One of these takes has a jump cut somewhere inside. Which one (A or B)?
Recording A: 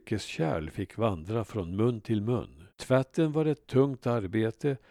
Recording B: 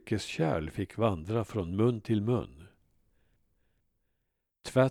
A